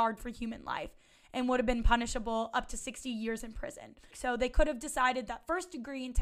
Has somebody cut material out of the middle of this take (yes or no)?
yes